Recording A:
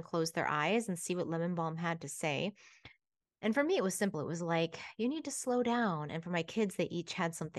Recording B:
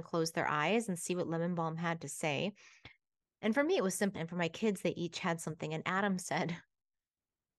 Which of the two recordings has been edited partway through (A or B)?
B